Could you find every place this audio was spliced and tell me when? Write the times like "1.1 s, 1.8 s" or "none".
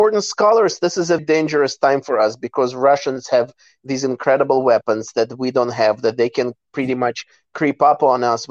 1.2 s